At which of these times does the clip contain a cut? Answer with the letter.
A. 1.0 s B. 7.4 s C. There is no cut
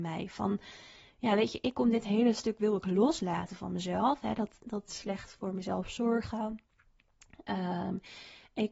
C